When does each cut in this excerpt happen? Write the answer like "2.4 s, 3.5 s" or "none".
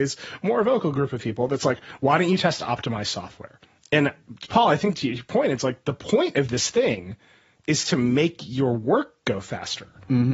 none

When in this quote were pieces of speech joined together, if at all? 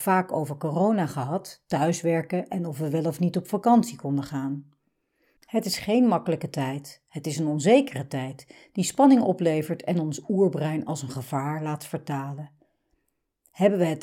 5.4 s

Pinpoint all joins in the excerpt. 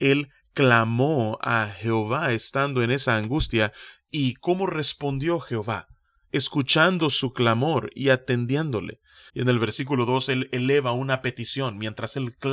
9.3 s

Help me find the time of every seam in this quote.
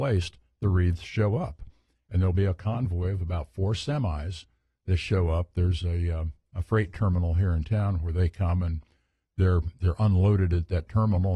none

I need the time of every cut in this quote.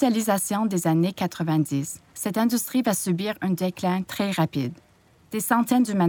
none

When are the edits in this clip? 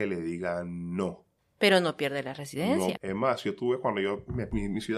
3.0 s

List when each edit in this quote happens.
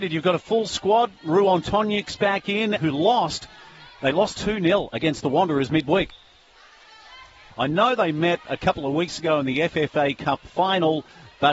2.8 s, 7.5 s

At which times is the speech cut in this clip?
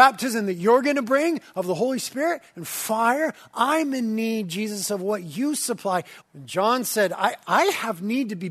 6.2 s

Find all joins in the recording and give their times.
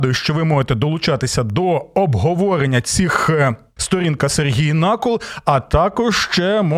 3.8 s

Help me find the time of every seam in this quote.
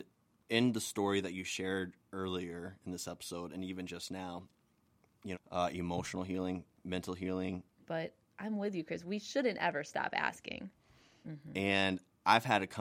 5.3 s, 7.8 s, 11.2 s

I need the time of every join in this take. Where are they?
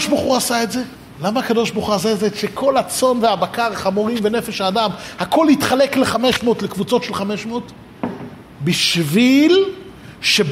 8.5 s

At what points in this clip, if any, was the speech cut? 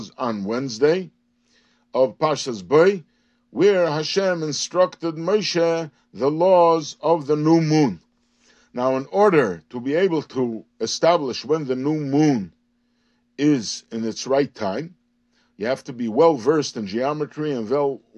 none

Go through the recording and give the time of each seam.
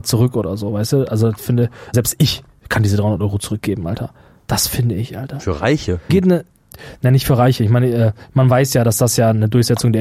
1.9 s, 4.4 s, 6.1 s

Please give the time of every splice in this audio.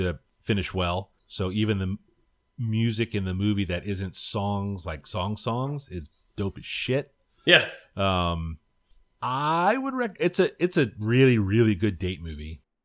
1.2 s

